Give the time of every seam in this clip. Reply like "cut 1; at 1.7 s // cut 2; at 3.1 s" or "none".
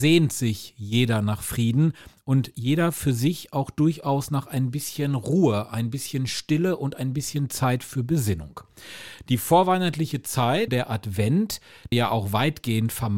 cut 1; at 10.7 s // cut 2; at 11.9 s